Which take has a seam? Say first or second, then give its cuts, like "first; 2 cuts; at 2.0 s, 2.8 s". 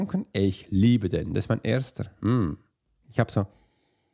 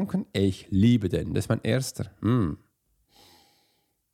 first; 1 cut; at 3.0 s